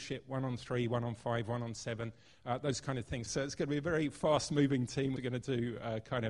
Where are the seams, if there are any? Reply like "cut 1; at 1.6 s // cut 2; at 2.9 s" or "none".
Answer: cut 1; at 3.3 s // cut 2; at 5.2 s

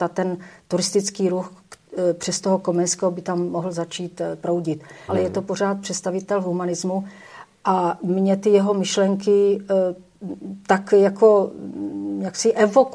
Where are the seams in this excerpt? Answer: cut 1; at 5.1 s

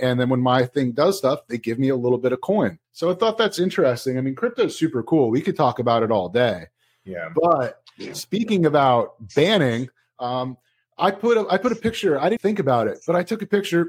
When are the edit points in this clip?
cut 1; at 2.8 s // cut 2; at 12.4 s

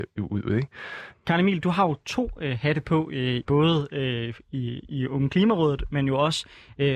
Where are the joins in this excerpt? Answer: cut 1; at 1.1 s // cut 2; at 3.4 s

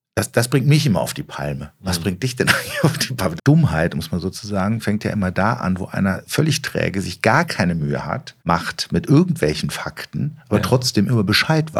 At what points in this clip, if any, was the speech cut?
cut 1; at 3.4 s // cut 2; at 8.4 s

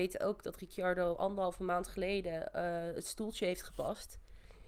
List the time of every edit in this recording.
none

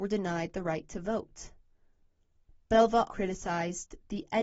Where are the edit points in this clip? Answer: cut 1; at 3.1 s

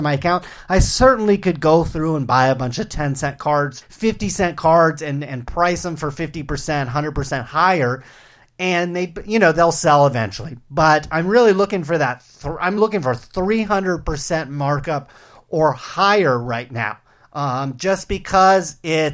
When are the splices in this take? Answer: cut 1; at 3.8 s // cut 2; at 12.8 s

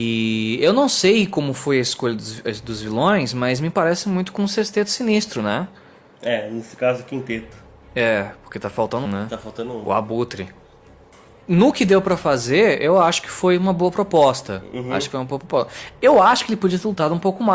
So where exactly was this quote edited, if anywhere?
cut 1; at 9.1 s

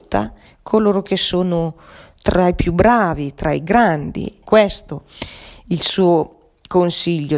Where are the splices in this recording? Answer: cut 1; at 4.5 s

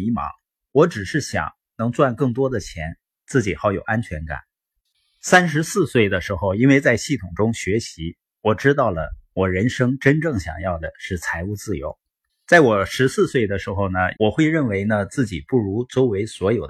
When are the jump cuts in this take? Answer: cut 1; at 12.3 s // cut 2; at 14.2 s

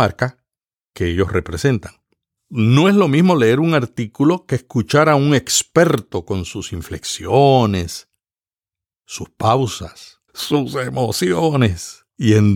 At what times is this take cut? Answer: cut 1; at 2.4 s // cut 2; at 10.3 s

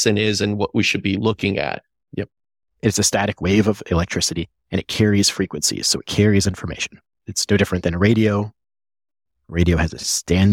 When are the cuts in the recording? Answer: cut 1; at 2.0 s

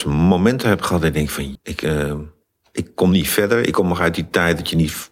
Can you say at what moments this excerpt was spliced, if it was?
cut 1; at 1.6 s

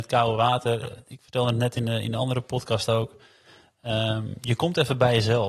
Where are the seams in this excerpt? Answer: none

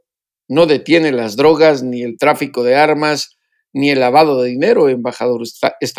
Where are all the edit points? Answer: none

